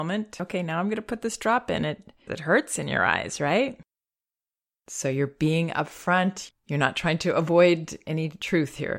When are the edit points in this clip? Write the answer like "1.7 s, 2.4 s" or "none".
2.3 s, 6.5 s